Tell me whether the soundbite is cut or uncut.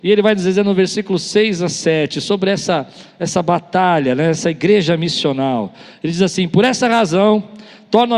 uncut